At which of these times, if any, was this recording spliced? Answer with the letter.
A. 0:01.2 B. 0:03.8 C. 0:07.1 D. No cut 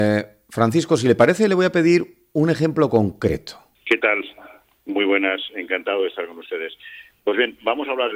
B